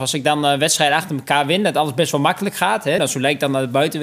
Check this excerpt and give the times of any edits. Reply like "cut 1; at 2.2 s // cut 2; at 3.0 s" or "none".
cut 1; at 3.0 s